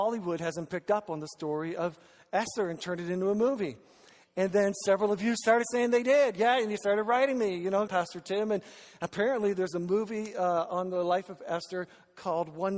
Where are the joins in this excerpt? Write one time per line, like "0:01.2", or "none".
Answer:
0:07.9

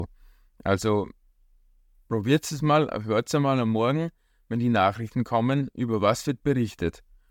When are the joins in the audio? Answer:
none

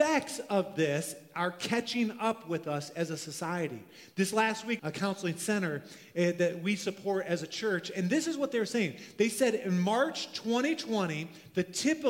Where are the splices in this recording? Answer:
0:04.8

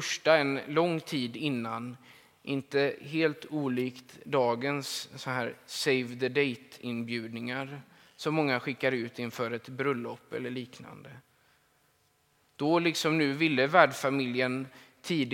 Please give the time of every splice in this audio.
none

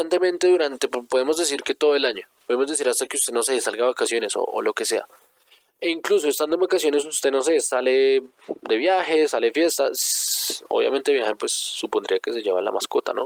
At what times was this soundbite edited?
none

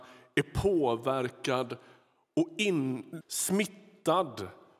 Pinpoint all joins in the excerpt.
0:03.2

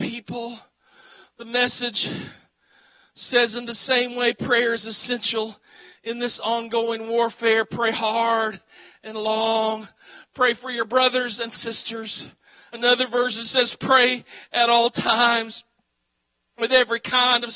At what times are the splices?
none

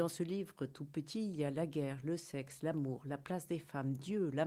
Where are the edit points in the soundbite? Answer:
none

